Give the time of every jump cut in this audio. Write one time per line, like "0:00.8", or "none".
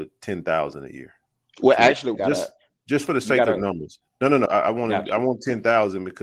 0:02.1
0:04.5

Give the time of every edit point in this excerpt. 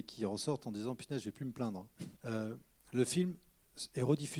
0:02.2

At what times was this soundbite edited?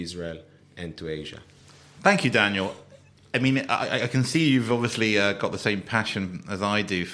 none

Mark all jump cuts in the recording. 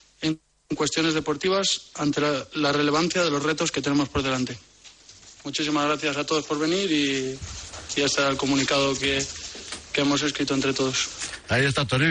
none

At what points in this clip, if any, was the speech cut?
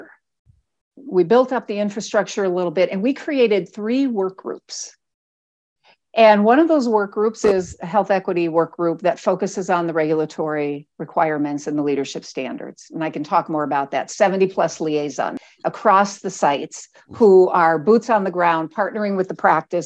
none

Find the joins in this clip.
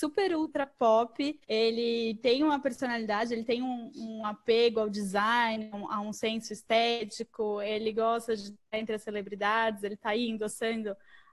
0:01.4

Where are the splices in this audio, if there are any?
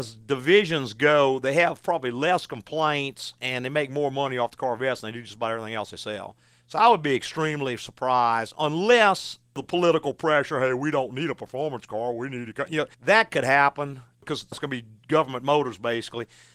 0:12.9
0:14.5

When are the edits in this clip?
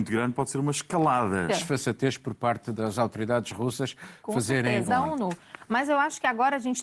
0:01.5
0:04.9

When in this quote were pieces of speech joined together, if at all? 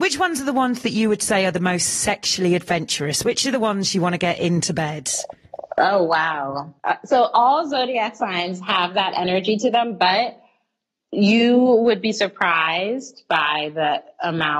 0:06.8

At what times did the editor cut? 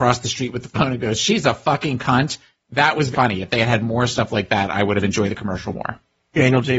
0:03.1

